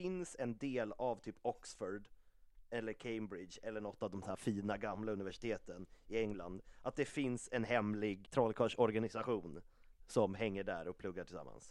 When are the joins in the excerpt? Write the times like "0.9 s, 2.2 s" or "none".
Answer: 8.2 s